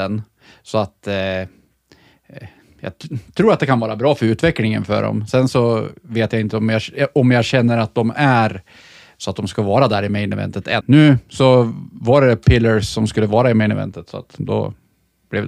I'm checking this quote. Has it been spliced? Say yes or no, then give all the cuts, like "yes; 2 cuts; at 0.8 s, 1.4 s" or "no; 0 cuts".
yes; 1 cut; at 10.8 s